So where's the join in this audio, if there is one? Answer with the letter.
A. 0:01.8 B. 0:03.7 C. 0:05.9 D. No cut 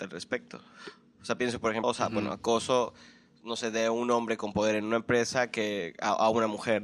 A